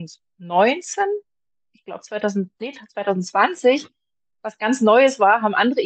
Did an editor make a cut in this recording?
no; 0 cuts

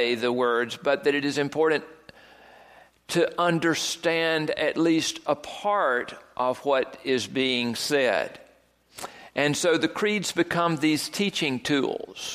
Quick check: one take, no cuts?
yes; 0 cuts

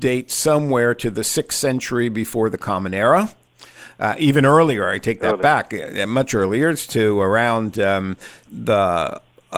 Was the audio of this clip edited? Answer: yes; 1 cut; at 8.5 s

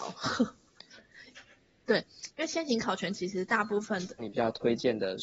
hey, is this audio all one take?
no; 1 cut; at 4.2 s

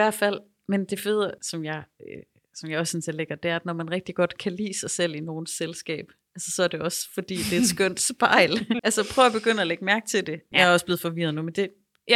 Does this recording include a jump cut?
yes; 3 cuts; at 1.4 s, 8.8 s, 10.5 s

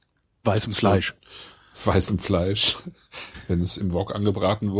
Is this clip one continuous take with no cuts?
yes; 0 cuts

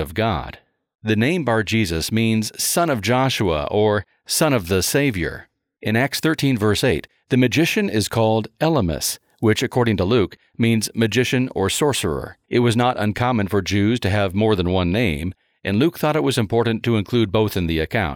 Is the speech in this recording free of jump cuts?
no; 1 cut; at 12.4 s

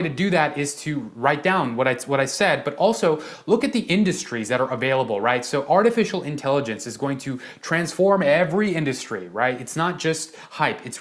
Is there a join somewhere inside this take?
no; 0 cuts

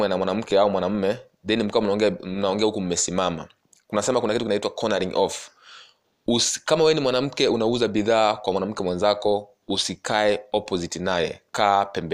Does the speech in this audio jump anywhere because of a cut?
no; 0 cuts

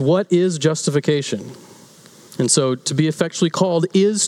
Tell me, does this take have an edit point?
yes; 1 cut; at 2.3 s

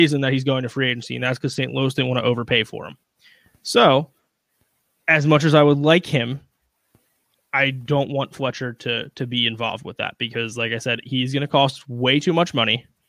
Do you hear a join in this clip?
no; 0 cuts

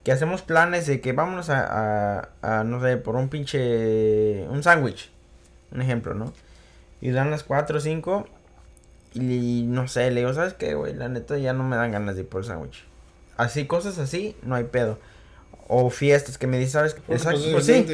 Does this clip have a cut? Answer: yes; 1 cut; at 17.0 s

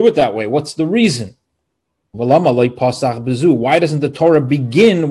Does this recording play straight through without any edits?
no; 1 cut; at 2.1 s

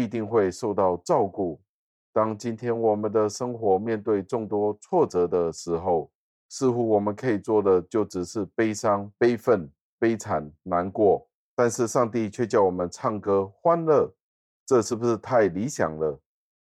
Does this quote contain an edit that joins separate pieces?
no; 0 cuts

